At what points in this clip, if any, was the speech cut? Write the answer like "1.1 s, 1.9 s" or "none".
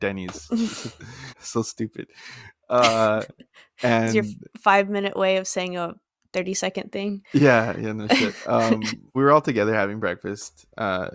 1.3 s, 9.1 s